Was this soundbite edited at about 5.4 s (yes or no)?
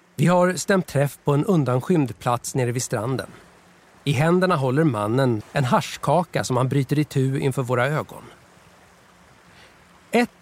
yes